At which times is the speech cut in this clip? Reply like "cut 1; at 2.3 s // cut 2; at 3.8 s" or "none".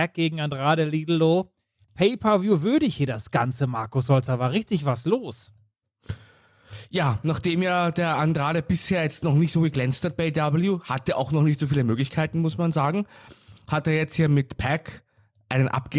none

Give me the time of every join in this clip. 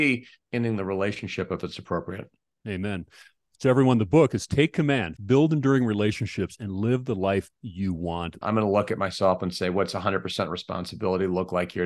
cut 1; at 5.2 s // cut 2; at 8.4 s

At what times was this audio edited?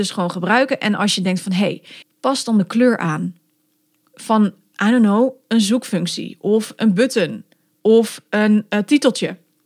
cut 1; at 2.0 s

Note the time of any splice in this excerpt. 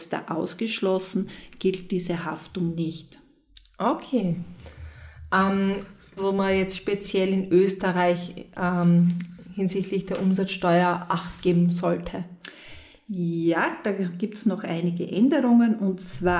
cut 1; at 6.2 s

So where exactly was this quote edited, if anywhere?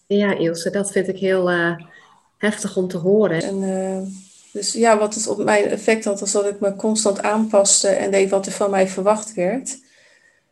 cut 1; at 3.4 s

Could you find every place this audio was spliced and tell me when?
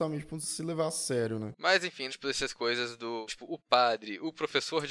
cut 1; at 2.1 s // cut 2; at 3.3 s

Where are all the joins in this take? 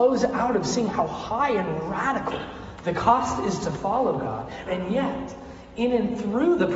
cut 1; at 4.7 s

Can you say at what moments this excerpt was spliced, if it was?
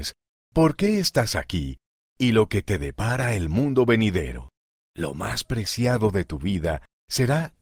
cut 1; at 4.7 s

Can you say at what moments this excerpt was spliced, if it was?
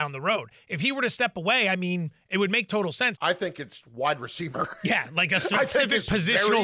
cut 1; at 3.1 s

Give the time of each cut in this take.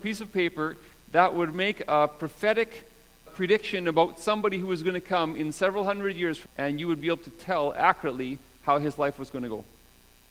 cut 1; at 3.3 s // cut 2; at 6.5 s

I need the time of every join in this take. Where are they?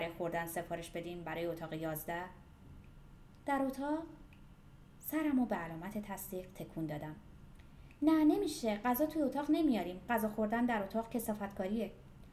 none

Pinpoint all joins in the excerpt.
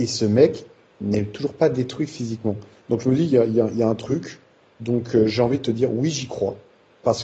none

